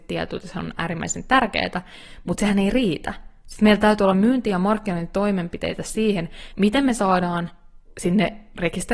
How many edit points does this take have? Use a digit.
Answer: 1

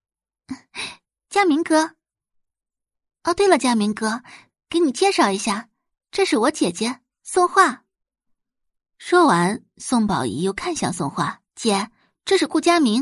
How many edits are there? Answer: 1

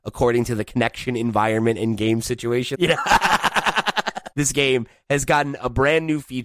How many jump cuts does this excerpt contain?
2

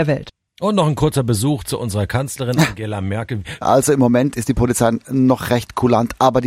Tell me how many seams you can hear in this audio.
1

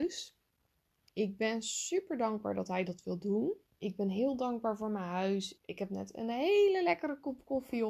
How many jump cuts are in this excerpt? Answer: 3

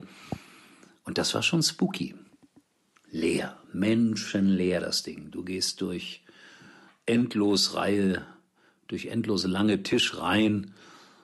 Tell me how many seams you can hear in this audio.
0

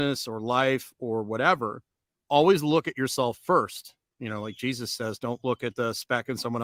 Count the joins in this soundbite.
0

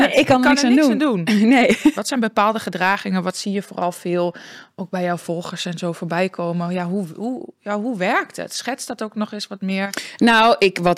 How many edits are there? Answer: 1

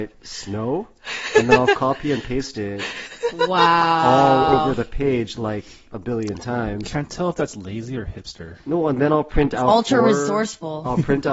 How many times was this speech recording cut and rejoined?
0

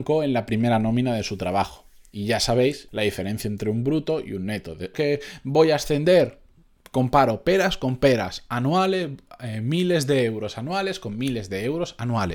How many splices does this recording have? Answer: 2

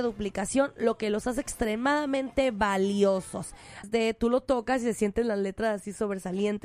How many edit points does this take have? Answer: 1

